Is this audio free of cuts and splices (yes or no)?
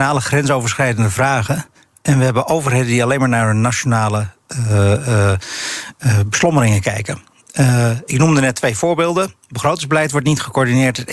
yes